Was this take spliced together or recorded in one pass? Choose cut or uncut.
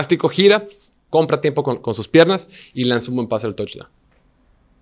uncut